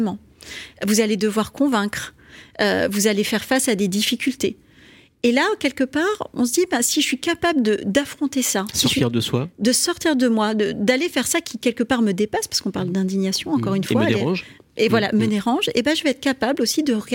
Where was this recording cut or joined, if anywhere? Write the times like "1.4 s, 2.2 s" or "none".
none